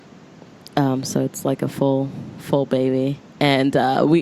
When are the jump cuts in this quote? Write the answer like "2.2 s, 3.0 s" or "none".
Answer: 3.3 s